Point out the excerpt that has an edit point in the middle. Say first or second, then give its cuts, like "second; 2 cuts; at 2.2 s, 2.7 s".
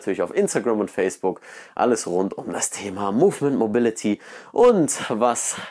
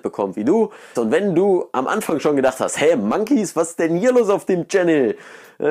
second; 1 cut; at 1.0 s